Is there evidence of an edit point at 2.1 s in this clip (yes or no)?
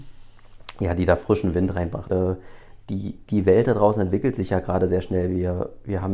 yes